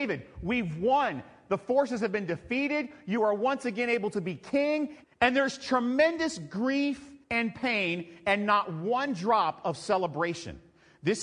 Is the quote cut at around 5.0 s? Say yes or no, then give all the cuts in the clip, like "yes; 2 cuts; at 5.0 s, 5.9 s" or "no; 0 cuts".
yes; 2 cuts; at 5.0 s, 7.2 s